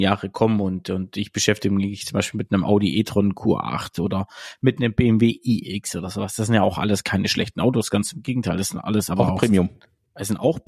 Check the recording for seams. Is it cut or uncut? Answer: uncut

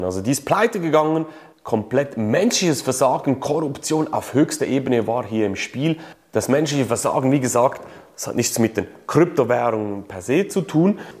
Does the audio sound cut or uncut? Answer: uncut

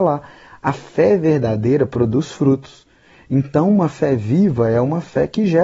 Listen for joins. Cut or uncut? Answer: uncut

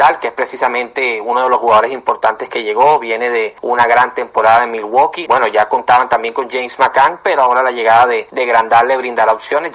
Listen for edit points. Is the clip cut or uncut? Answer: cut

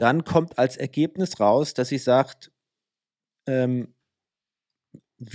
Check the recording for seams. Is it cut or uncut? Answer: uncut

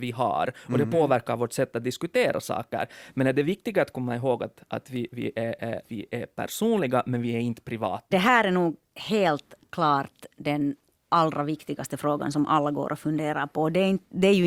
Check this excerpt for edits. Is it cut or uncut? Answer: cut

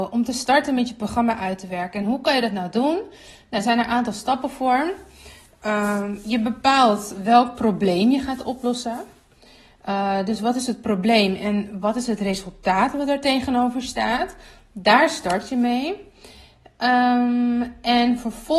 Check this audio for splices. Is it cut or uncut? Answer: uncut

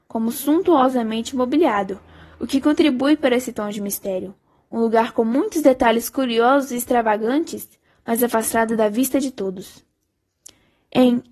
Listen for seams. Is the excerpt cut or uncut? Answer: cut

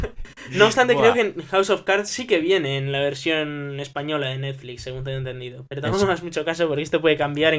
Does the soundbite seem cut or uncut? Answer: uncut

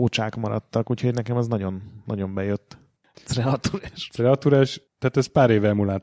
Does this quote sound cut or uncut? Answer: cut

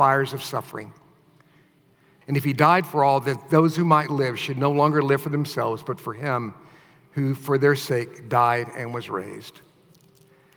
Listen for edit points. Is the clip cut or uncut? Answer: cut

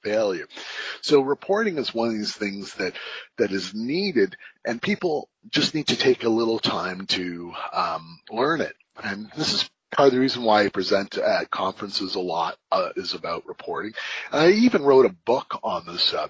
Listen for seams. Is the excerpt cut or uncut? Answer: uncut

